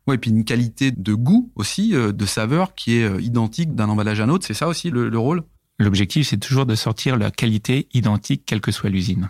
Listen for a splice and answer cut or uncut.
uncut